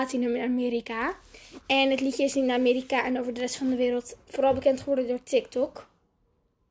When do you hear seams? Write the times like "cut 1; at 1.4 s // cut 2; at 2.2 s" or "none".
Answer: cut 1; at 4.2 s